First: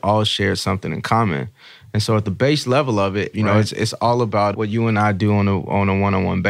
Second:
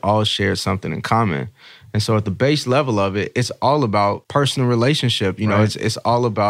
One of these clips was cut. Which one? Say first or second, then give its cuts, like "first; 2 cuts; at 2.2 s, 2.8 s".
first; 1 cut; at 3.3 s